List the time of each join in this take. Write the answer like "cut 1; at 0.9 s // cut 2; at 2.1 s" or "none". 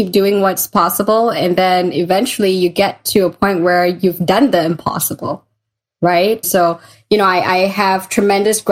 cut 1; at 6.4 s